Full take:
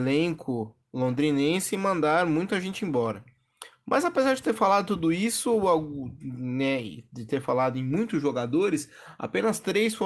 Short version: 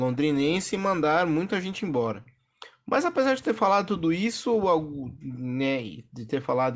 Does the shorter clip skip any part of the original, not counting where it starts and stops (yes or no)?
no